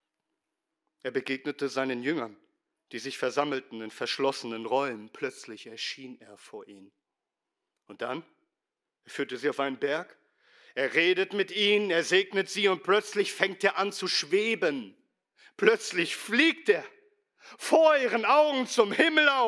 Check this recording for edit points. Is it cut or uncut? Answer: uncut